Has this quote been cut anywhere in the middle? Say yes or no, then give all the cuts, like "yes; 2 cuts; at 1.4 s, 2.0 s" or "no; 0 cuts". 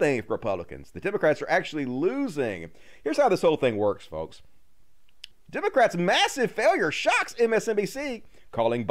yes; 1 cut; at 5.3 s